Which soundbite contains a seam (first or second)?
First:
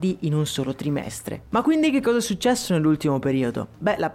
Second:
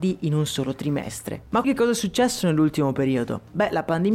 second